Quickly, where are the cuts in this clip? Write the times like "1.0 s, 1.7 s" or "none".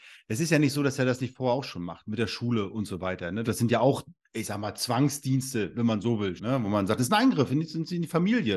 3.4 s, 6.4 s